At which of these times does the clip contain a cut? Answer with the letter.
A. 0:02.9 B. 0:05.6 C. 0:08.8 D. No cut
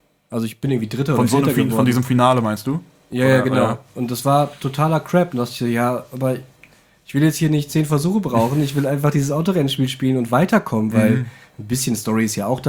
D